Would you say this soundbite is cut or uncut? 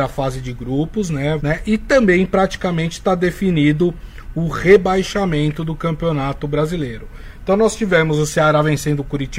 cut